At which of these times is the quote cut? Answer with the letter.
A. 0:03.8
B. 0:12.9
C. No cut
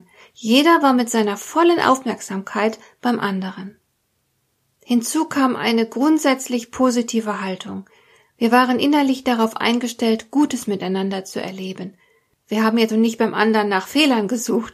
B